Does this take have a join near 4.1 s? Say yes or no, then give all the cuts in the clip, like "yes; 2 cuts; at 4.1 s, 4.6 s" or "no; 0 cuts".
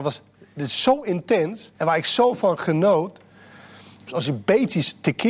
yes; 2 cuts; at 1.7 s, 4.1 s